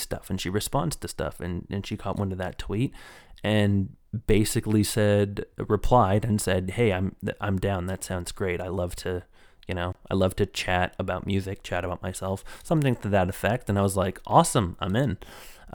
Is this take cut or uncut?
uncut